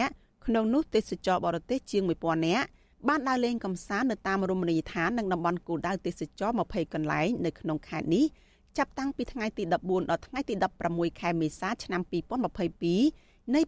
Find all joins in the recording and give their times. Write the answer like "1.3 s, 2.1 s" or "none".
none